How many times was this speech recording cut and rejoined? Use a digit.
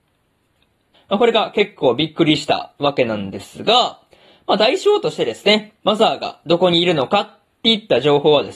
1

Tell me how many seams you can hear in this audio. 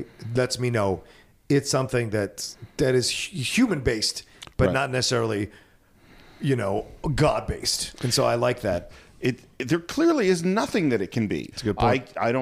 2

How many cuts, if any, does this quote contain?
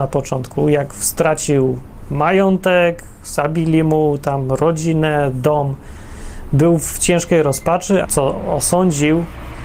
1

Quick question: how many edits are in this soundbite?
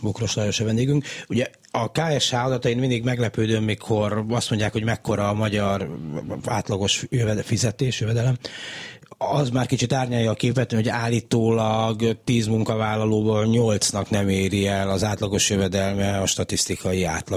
0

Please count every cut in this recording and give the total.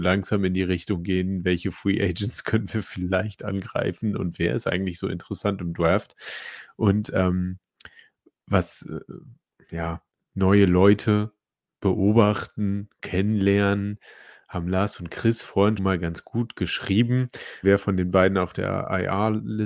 2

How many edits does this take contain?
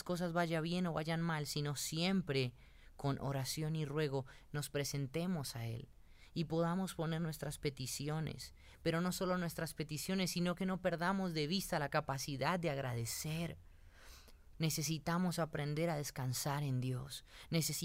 1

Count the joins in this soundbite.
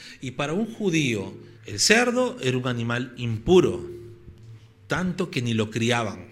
1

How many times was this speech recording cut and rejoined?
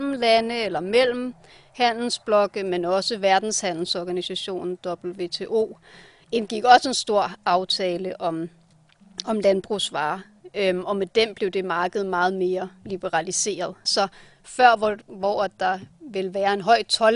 1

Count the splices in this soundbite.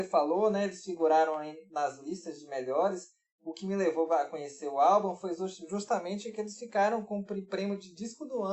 0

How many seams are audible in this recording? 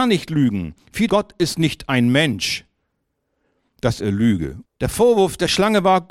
2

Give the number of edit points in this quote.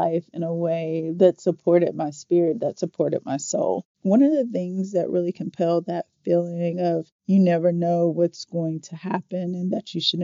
1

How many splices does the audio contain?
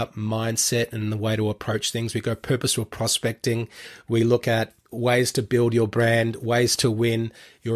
0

